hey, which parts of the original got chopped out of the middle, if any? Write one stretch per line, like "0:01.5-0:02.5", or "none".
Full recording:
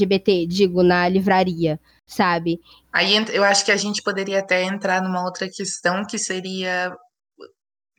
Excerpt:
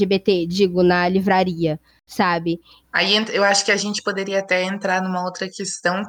none